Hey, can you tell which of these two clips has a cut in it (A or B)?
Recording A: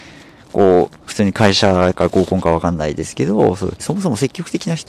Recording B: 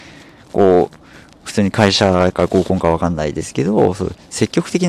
A